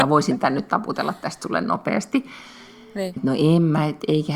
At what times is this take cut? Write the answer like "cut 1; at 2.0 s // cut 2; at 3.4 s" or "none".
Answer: cut 1; at 3.2 s